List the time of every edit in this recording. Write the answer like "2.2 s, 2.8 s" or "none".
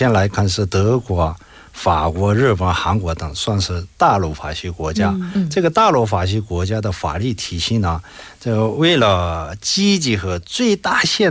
none